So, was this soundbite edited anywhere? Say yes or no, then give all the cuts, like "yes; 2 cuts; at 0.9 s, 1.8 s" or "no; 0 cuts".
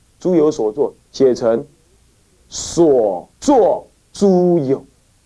yes; 2 cuts; at 1.1 s, 3.3 s